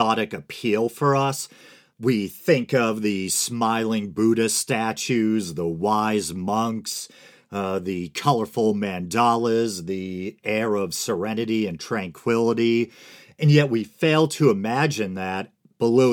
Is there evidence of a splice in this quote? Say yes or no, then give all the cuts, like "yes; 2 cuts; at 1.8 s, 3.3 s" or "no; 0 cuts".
no; 0 cuts